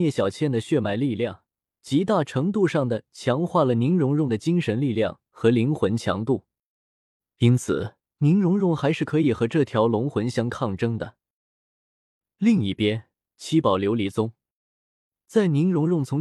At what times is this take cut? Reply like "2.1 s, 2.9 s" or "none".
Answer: 8.1 s